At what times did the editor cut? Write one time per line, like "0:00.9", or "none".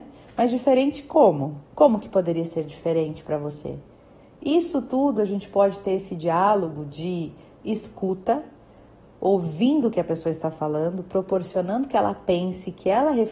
0:01.7